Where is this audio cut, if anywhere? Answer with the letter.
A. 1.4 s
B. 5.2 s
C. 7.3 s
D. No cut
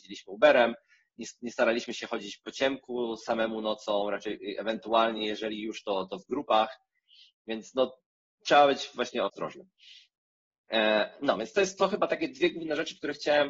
D